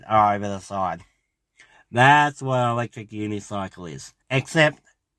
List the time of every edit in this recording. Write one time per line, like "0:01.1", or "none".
0:04.2